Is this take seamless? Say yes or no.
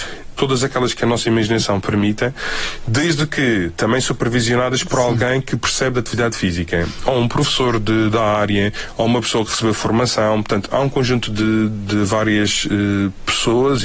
yes